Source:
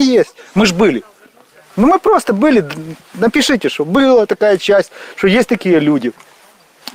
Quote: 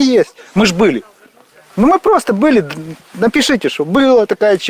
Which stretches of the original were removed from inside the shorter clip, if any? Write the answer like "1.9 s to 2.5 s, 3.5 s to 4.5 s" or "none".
none